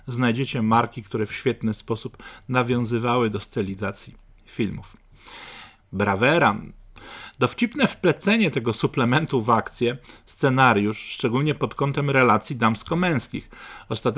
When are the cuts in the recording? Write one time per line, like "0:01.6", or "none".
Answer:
0:05.8